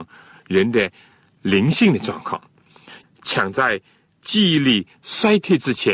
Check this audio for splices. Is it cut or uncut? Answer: cut